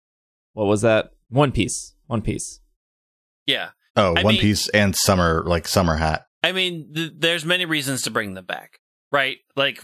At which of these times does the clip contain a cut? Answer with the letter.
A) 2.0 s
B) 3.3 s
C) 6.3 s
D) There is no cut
C